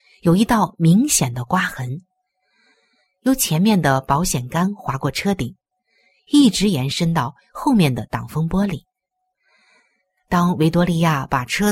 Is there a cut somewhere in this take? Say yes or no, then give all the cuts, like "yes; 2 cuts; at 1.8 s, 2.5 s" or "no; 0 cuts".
no; 0 cuts